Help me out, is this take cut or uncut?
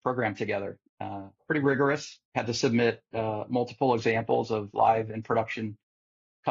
cut